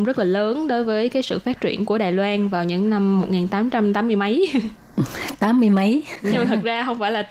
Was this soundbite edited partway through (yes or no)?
yes